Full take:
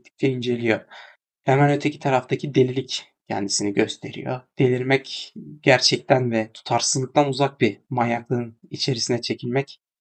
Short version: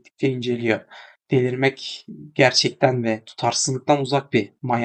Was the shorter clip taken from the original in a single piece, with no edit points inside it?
no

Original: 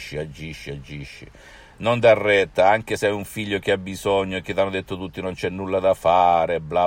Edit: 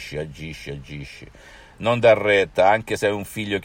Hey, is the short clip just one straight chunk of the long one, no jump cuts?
yes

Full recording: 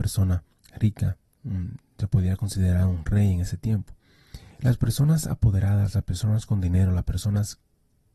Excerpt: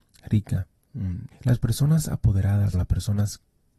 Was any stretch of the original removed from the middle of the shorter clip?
yes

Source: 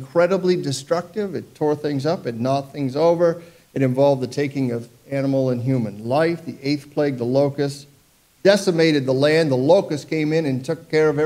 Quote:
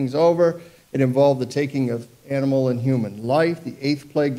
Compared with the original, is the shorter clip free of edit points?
yes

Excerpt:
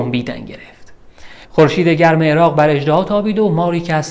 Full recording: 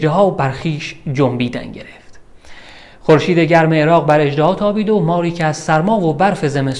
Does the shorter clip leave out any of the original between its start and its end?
yes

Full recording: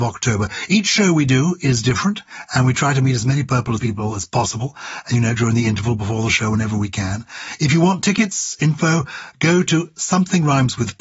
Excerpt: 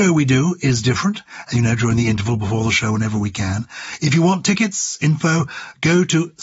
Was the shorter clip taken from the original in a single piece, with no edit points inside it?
no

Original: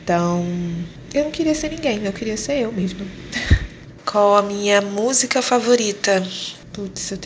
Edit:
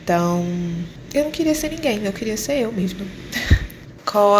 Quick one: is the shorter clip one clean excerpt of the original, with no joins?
yes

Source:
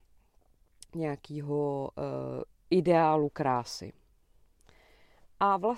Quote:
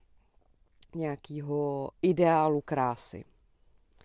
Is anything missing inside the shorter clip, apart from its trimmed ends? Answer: yes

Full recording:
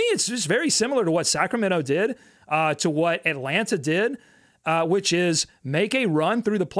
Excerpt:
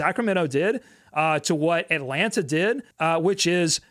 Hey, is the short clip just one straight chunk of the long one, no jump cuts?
no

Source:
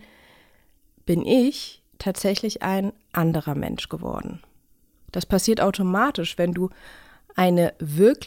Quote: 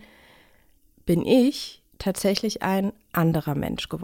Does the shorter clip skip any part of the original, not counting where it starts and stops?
no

